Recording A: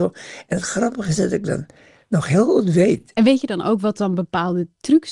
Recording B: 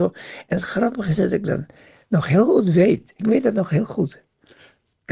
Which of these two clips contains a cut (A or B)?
A